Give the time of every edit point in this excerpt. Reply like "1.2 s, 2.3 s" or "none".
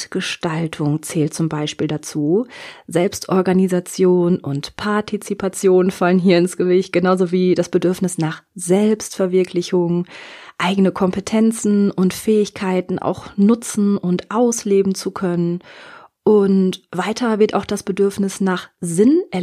none